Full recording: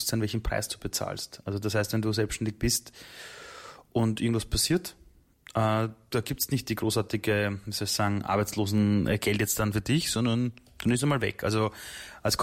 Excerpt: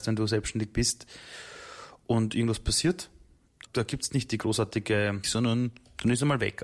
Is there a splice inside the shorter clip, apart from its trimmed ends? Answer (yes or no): yes